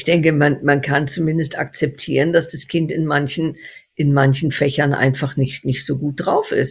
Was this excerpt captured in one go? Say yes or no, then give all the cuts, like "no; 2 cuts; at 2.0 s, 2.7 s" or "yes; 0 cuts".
yes; 0 cuts